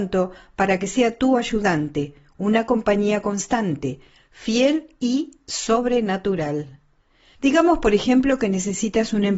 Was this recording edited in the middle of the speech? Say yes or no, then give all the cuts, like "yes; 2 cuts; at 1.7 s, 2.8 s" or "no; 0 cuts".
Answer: yes; 1 cut; at 7.4 s